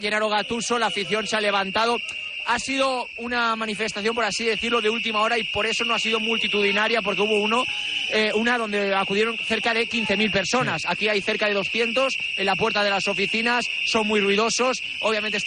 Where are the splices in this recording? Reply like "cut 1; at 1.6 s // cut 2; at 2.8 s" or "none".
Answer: none